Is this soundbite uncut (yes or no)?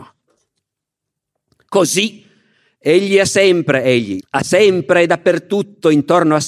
no